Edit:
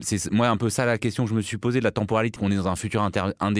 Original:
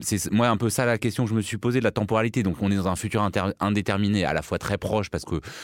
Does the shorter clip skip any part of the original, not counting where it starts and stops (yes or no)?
yes